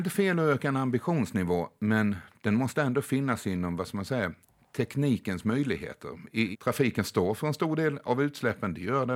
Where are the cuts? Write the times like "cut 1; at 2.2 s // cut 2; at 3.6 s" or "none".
cut 1; at 6.5 s